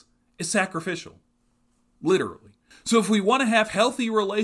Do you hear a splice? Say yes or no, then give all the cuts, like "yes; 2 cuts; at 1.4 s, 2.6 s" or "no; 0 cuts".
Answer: yes; 1 cut; at 2.7 s